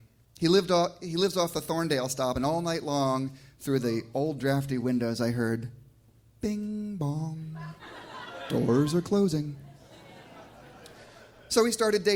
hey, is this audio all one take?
yes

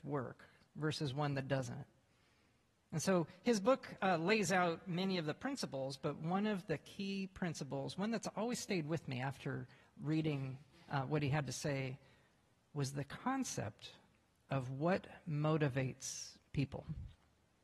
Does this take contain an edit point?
no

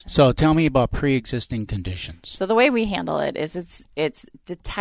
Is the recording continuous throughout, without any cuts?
yes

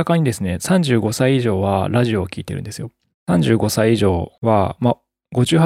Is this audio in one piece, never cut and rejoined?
no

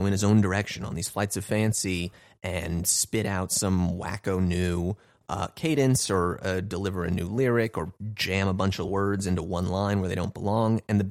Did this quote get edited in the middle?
no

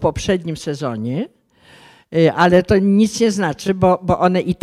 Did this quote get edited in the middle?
no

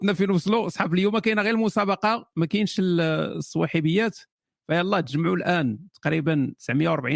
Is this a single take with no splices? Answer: yes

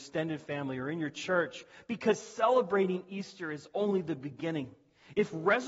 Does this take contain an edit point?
no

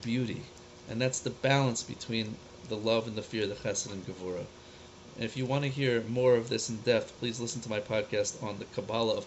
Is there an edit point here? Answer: no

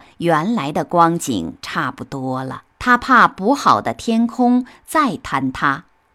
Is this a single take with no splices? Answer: no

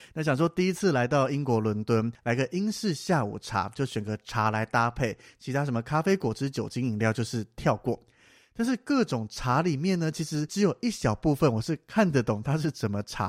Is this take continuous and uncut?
yes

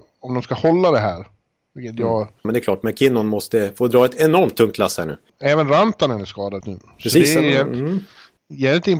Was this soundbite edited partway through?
yes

